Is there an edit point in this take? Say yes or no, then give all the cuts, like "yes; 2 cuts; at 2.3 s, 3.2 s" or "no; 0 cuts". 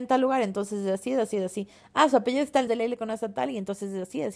yes; 1 cut; at 2.7 s